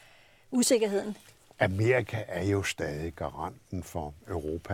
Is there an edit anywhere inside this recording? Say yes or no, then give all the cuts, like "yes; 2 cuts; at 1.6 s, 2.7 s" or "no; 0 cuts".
no; 0 cuts